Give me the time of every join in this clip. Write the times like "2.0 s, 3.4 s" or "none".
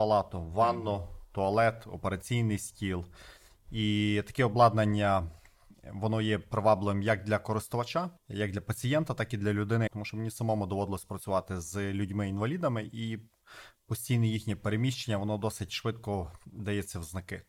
8.2 s, 9.9 s